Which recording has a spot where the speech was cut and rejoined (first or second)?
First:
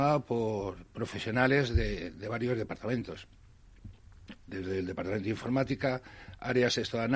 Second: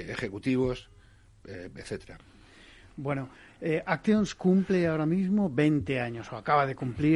first